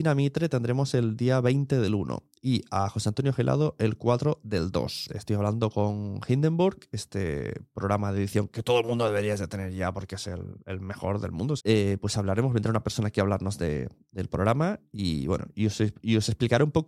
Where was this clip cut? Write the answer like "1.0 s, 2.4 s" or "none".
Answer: 5.1 s, 11.6 s